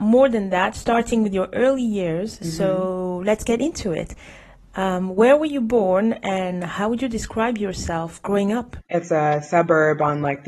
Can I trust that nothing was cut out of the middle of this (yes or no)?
no